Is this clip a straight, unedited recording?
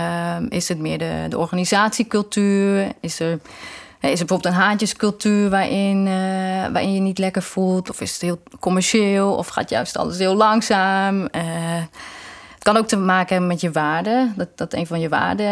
yes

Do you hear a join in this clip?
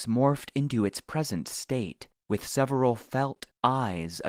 yes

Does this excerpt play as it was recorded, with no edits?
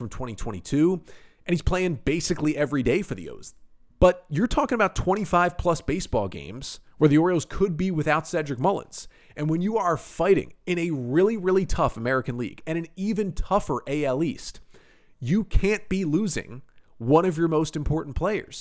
no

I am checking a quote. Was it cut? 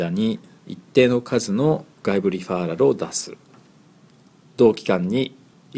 no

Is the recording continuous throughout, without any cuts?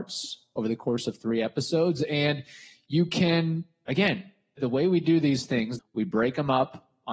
no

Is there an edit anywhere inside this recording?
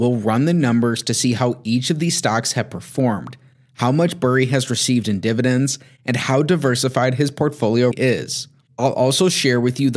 yes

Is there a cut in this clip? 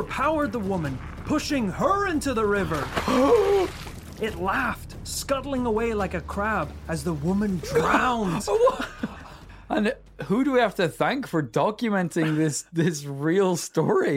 no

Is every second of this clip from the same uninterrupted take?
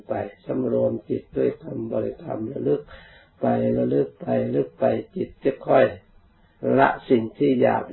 yes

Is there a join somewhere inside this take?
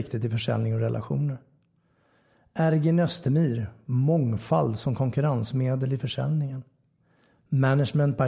no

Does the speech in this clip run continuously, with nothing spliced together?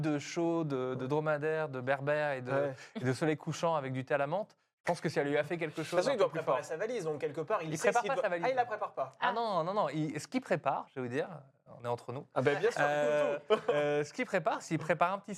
yes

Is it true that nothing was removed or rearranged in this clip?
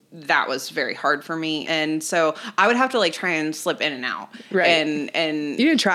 no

